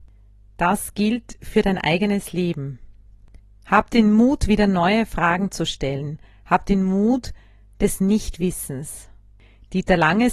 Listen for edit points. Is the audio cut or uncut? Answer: uncut